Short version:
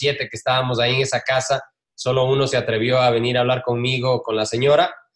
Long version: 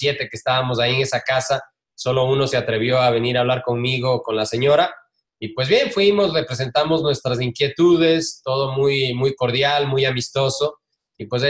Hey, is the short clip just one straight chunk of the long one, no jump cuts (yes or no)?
yes